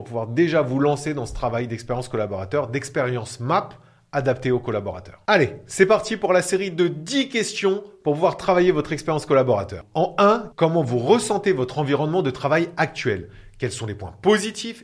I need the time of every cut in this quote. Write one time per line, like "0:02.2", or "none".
0:10.5